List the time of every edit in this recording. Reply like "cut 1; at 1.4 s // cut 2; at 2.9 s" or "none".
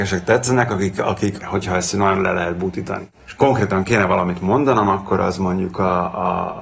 cut 1; at 1.4 s // cut 2; at 3.2 s